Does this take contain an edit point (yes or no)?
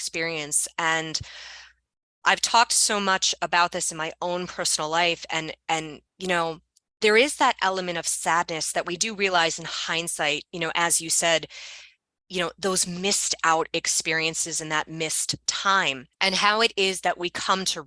yes